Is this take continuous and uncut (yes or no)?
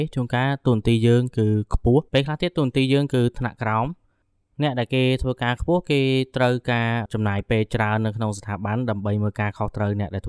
no